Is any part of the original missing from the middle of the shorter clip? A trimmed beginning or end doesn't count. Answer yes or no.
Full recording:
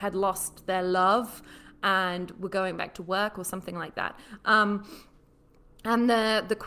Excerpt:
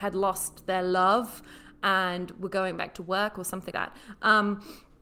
yes